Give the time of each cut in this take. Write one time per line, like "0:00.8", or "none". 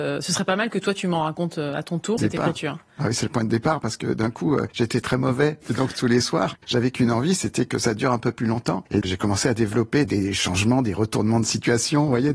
0:02.2
0:05.6
0:09.0